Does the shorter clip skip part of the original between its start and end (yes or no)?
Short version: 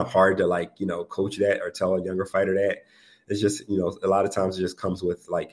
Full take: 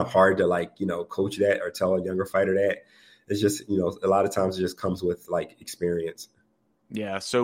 no